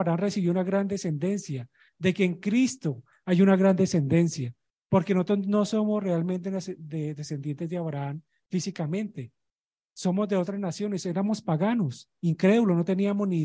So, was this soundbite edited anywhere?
no; 0 cuts

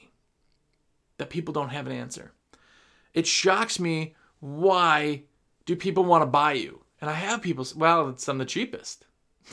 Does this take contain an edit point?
no; 0 cuts

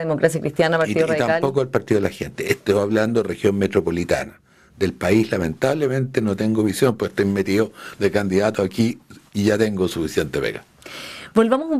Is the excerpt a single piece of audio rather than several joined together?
yes; 0 cuts

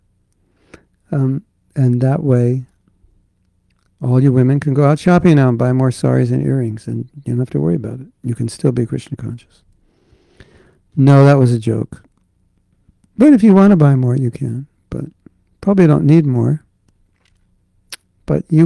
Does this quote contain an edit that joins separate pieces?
no; 0 cuts

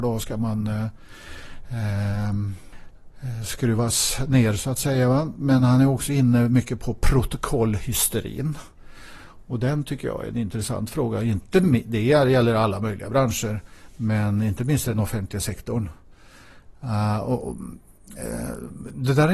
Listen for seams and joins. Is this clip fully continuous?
yes; 0 cuts

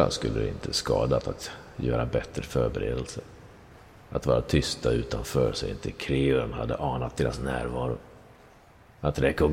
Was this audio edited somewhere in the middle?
no; 0 cuts

